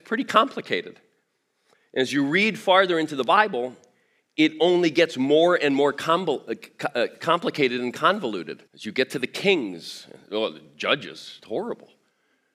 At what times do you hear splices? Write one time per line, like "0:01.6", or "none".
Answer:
0:08.7
0:11.4